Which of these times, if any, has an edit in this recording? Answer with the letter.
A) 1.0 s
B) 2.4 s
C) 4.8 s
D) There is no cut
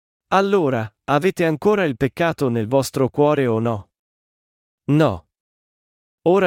D